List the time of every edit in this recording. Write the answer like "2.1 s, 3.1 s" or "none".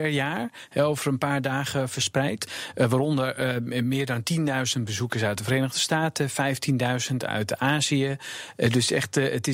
none